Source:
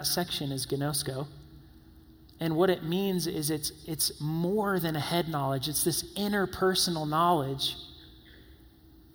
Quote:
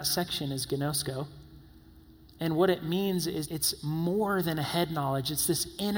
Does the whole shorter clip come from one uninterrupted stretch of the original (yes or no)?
no